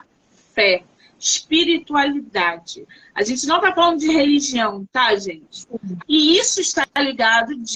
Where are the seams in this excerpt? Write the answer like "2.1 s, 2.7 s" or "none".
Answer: 6.0 s